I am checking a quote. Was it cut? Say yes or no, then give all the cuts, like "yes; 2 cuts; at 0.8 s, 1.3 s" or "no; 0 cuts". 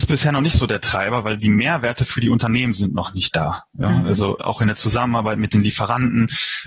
no; 0 cuts